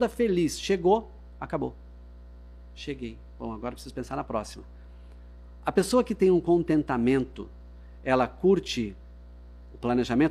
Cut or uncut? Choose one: uncut